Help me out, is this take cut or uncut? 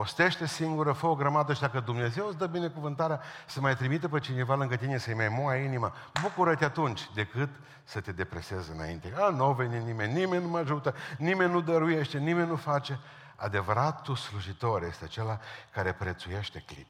uncut